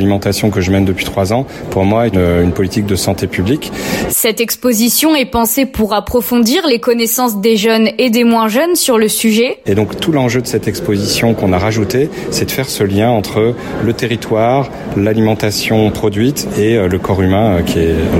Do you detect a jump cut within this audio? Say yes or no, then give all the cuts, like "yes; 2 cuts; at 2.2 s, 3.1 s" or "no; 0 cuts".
yes; 3 cuts; at 2.1 s, 4.1 s, 9.7 s